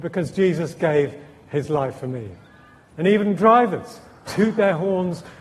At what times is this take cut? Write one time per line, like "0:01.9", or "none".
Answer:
0:02.9
0:04.3